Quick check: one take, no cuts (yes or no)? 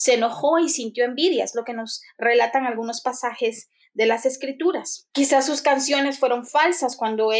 no